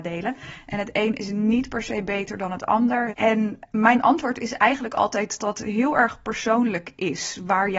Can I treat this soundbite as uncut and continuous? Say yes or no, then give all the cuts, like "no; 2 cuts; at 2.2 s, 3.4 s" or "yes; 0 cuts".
no; 2 cuts; at 3.1 s, 5.4 s